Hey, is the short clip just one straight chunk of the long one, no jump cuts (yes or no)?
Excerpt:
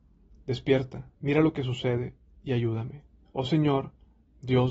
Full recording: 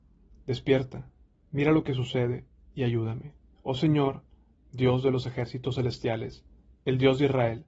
no